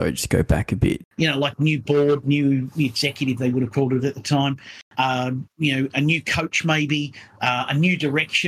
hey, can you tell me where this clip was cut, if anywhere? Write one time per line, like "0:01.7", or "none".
0:01.0